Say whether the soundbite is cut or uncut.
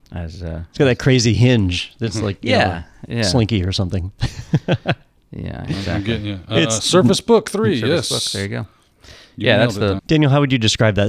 cut